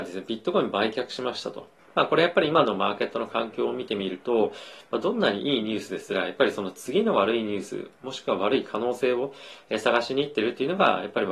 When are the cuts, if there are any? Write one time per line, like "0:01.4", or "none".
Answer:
0:01.8